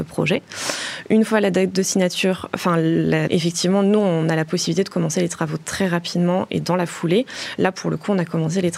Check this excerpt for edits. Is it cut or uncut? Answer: cut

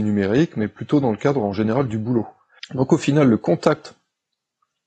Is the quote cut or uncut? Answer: cut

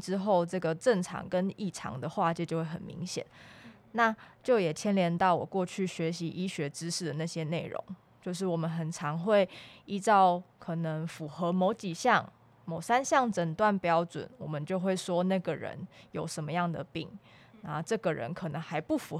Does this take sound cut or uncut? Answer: uncut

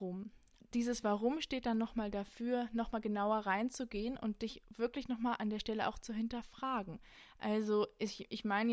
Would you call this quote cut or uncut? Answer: uncut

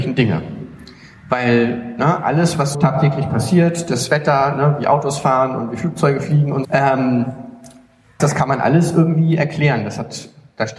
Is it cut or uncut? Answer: cut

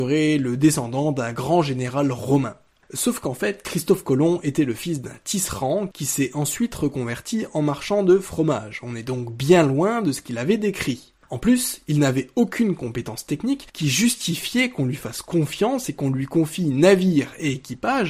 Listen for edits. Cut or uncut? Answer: uncut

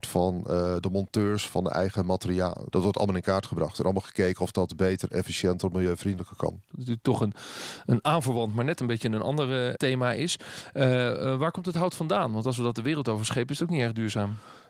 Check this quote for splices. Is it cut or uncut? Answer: cut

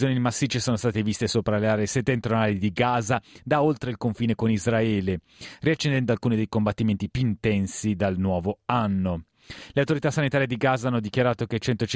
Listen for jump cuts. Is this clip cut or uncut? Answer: uncut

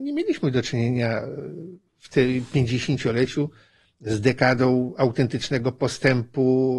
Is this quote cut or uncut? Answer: uncut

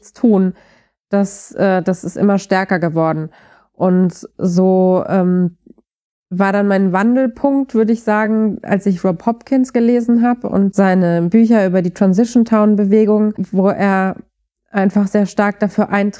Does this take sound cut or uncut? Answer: uncut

